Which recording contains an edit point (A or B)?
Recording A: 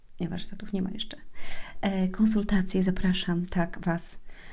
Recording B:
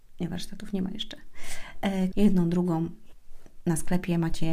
B